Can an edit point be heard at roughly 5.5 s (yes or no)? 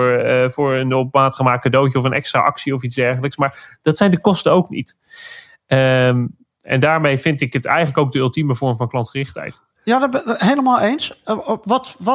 no